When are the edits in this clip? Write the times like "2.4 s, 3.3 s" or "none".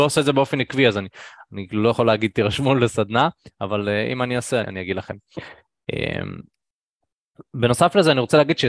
4.6 s